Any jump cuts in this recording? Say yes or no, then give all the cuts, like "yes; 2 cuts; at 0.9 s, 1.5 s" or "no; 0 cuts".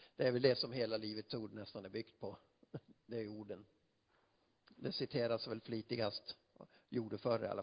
no; 0 cuts